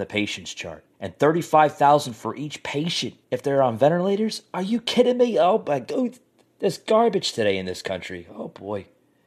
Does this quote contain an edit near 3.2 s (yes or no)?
yes